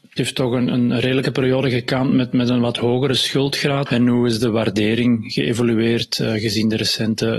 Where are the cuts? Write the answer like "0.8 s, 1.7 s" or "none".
3.9 s